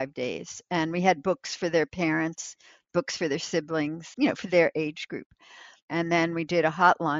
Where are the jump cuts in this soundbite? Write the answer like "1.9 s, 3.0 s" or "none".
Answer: 4.1 s, 5.8 s